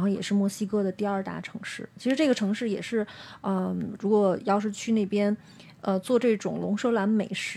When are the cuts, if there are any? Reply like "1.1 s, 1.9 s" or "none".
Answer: 4.0 s